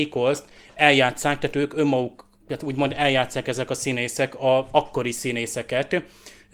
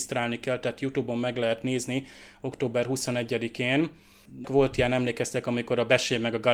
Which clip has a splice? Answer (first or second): second